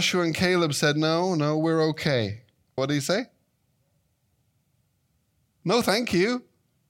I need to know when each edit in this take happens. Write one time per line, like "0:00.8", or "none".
0:02.8

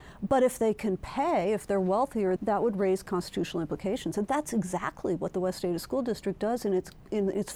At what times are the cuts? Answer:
0:02.4

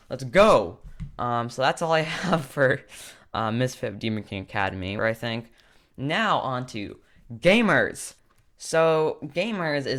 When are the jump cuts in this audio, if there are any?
0:05.0

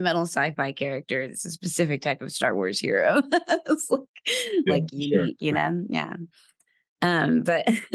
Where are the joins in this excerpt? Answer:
0:04.7

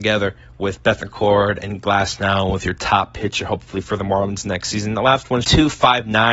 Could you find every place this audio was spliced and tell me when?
0:05.4

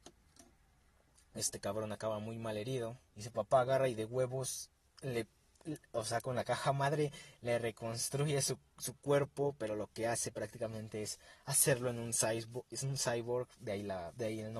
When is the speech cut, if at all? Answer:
0:03.1

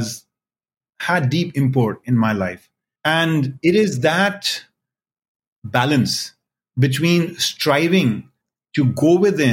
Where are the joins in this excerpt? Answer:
0:03.0

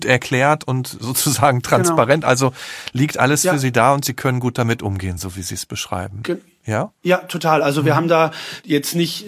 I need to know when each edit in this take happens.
none

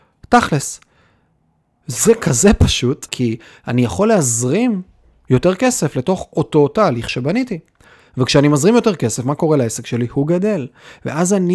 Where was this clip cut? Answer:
0:03.1

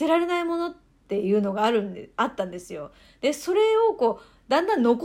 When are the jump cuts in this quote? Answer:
none

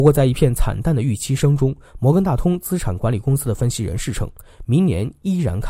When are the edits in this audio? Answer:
none

